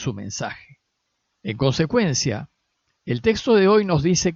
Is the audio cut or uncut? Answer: cut